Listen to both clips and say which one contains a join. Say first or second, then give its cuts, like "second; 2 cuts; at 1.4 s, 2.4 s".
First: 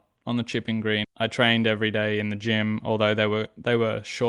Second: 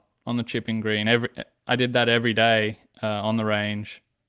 first; 1 cut; at 1.0 s